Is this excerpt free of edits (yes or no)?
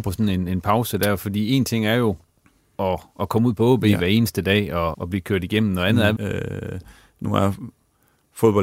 no